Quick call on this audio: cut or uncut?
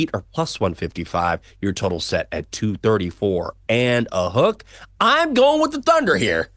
uncut